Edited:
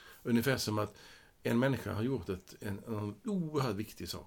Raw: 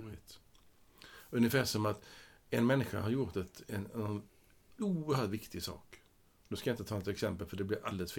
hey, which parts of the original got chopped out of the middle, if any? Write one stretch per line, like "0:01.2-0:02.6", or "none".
0:04.3-0:04.7